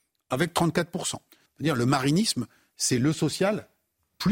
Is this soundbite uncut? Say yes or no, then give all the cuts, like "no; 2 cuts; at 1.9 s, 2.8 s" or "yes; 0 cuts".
no; 1 cut; at 1.5 s